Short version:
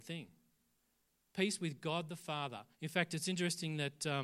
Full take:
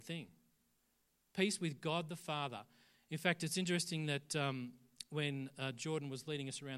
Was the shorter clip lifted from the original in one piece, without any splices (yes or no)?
no